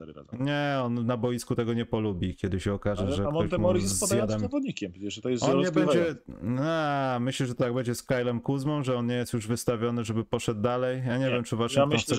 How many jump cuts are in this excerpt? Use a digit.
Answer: 0